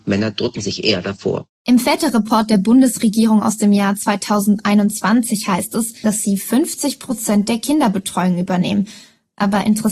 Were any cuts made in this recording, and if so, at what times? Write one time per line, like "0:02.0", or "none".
0:06.0